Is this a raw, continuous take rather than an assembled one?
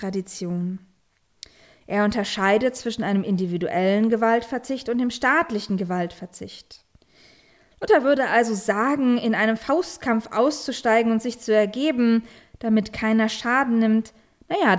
yes; 0 cuts

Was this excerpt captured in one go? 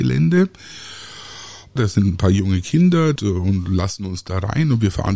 no; 2 cuts; at 1.8 s, 3.2 s

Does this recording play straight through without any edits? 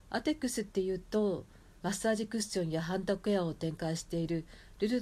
no; 1 cut; at 1.8 s

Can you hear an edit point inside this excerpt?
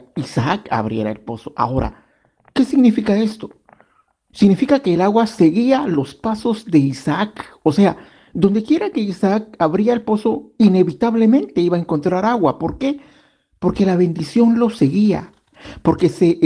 no; 0 cuts

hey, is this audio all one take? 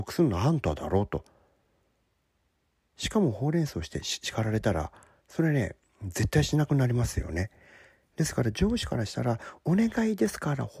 yes; 0 cuts

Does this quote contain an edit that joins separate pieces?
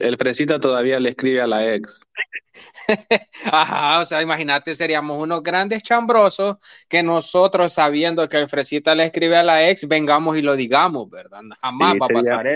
no; 0 cuts

